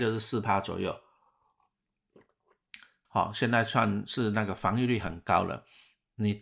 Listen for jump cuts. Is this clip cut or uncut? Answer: cut